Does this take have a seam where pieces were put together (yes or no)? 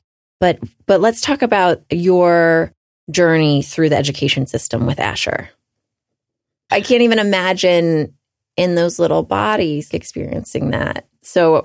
yes